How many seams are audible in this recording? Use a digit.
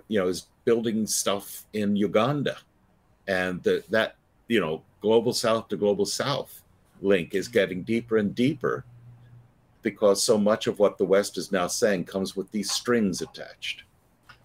0